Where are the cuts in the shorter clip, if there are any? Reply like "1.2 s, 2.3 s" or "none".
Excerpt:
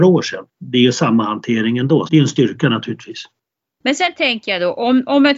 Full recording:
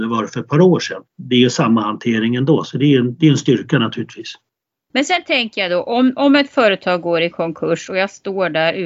2.1 s